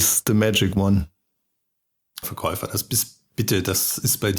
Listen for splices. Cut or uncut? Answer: cut